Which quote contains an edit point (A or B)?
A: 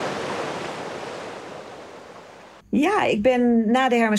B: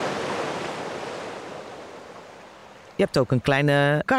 A